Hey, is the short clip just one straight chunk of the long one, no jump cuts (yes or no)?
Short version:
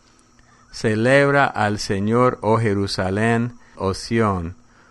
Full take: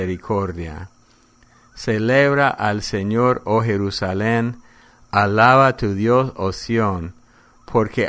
no